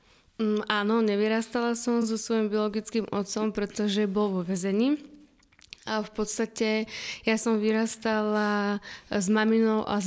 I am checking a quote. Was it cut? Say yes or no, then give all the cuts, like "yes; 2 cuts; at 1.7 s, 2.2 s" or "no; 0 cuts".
no; 0 cuts